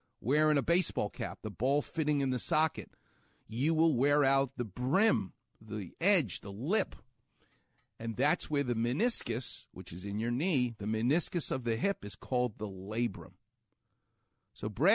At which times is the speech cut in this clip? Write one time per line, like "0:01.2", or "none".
0:05.6